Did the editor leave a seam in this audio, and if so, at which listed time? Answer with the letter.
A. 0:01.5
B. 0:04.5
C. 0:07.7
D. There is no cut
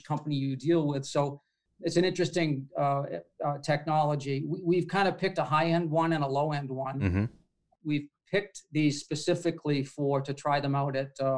C